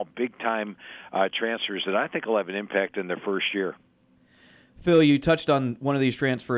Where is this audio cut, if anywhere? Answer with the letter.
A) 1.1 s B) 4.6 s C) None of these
C